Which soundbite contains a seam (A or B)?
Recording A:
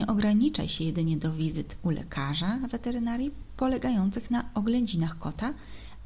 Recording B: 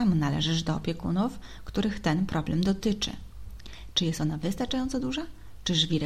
B